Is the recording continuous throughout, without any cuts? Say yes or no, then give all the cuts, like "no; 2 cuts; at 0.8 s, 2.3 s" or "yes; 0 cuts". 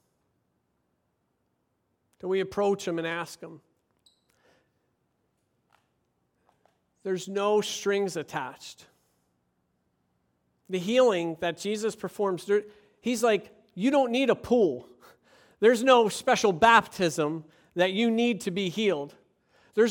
yes; 0 cuts